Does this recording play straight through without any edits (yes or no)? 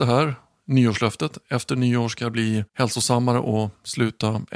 no